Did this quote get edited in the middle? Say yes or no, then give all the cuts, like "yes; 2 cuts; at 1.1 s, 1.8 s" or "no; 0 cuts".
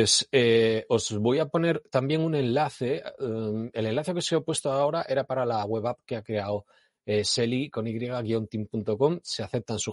no; 0 cuts